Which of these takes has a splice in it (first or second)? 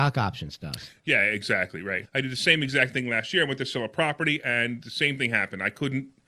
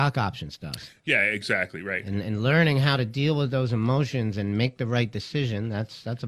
first